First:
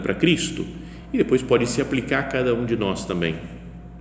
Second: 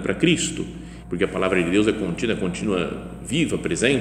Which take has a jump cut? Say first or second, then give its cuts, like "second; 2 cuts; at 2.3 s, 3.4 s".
second; 1 cut; at 1.0 s